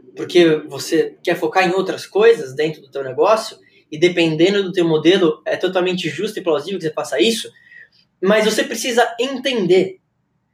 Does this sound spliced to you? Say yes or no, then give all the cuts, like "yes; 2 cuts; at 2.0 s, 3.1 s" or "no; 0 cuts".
no; 0 cuts